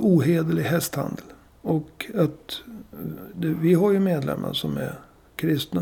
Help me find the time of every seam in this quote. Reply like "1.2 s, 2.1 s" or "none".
1.5 s

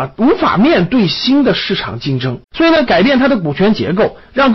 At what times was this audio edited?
2.4 s

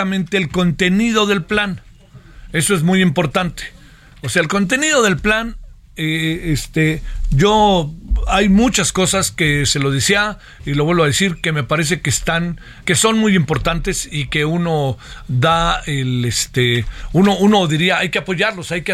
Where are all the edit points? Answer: 12.8 s

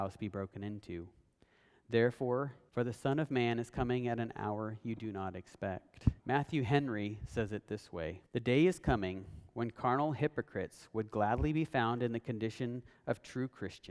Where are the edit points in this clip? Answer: 2.7 s, 6.2 s, 8.3 s

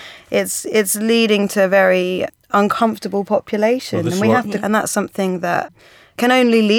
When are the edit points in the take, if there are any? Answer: 4.6 s

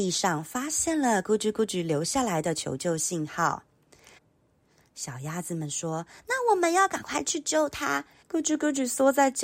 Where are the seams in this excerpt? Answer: 4.2 s, 8.2 s

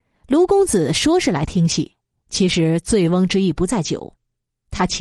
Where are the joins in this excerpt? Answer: none

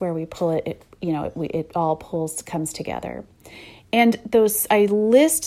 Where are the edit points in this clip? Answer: none

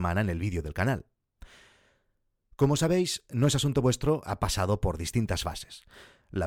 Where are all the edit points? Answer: none

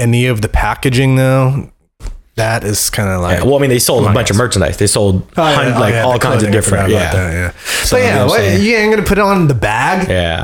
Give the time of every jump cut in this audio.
none

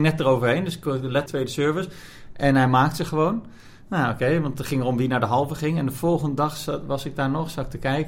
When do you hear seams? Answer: 1.3 s

